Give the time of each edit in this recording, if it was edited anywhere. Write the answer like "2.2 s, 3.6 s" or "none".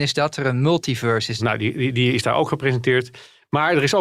1.4 s